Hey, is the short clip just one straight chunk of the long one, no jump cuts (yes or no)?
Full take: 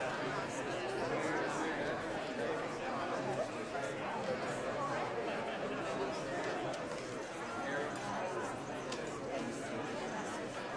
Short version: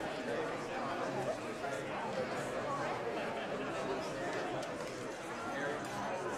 yes